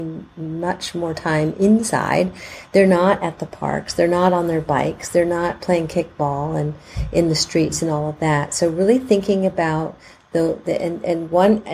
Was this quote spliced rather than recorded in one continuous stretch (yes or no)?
no